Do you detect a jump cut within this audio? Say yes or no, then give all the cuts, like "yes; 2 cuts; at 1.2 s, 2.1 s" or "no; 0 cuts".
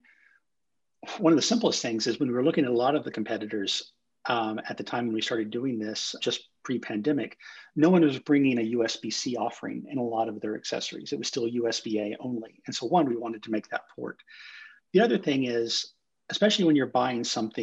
yes; 1 cut; at 6.2 s